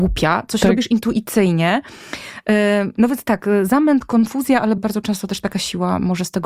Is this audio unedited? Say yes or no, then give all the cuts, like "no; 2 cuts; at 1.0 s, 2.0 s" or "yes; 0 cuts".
no; 1 cut; at 4.8 s